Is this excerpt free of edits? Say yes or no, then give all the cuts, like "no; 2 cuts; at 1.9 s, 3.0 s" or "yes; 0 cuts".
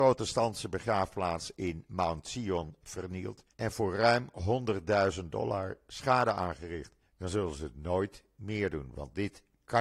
no; 2 cuts; at 3.5 s, 7.0 s